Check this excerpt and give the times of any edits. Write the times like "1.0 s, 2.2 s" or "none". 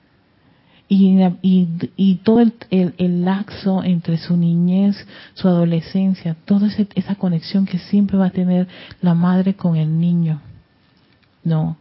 none